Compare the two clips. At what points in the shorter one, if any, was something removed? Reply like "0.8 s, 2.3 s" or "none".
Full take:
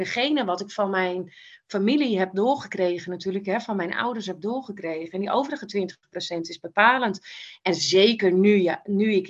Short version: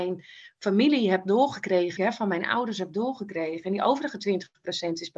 2.0 s